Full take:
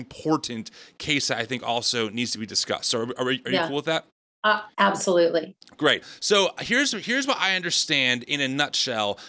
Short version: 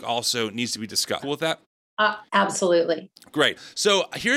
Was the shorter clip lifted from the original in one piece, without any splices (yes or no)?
no